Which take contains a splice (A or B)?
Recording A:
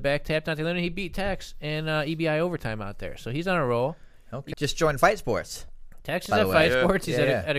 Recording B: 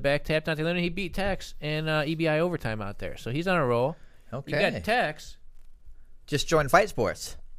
A